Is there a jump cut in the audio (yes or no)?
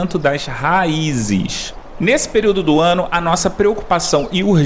no